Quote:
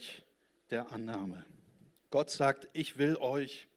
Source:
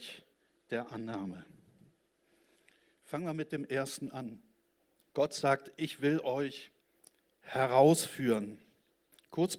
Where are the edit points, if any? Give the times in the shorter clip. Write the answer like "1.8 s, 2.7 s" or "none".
2.0 s